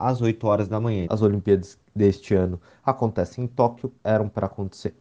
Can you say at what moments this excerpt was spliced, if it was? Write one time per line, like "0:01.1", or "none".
0:01.0
0:04.0